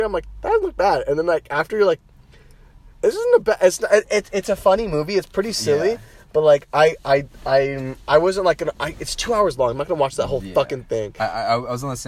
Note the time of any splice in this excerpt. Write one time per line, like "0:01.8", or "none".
0:02.9